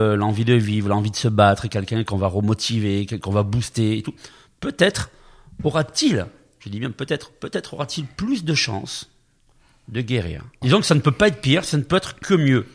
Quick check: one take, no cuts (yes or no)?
no